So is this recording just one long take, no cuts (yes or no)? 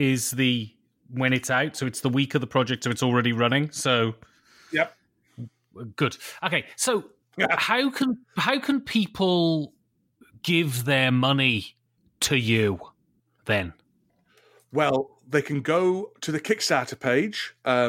yes